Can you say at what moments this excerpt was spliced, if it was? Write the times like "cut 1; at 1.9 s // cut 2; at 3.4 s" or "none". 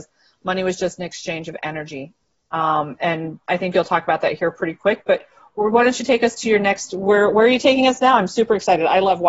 none

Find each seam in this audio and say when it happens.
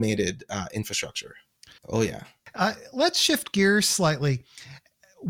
cut 1; at 1.8 s

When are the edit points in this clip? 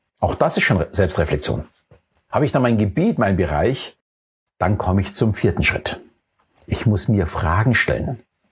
none

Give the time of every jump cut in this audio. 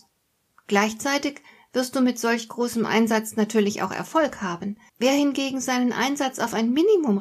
cut 1; at 4.9 s

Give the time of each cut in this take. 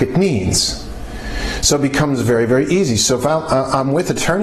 none

